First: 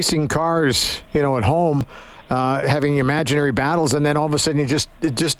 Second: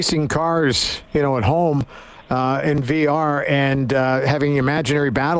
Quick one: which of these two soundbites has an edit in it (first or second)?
first